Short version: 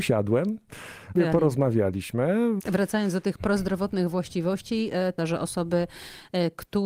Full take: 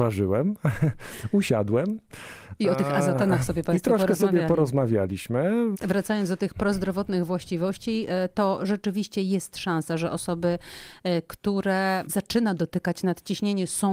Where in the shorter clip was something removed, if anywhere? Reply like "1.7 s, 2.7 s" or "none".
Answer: 1.2 s, 5.2 s